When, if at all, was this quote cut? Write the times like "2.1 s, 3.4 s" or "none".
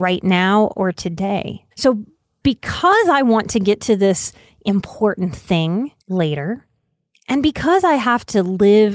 1.7 s, 6.0 s